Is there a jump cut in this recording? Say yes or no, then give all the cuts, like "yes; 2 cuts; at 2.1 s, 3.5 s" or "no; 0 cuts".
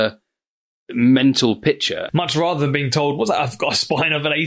yes; 1 cut; at 2.1 s